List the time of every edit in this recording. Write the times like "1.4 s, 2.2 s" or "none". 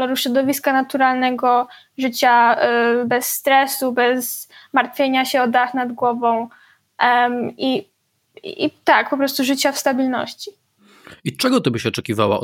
none